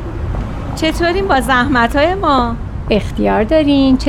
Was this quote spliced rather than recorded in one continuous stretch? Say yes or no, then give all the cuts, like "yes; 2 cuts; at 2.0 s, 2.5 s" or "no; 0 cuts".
no; 0 cuts